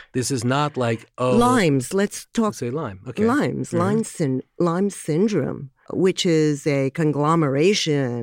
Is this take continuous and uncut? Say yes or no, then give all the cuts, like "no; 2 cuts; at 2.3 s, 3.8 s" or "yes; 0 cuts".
yes; 0 cuts